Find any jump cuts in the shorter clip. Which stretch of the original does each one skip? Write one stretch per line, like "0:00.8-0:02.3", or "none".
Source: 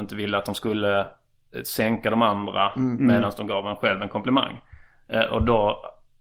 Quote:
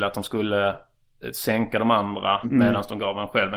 0:02.7-0:02.9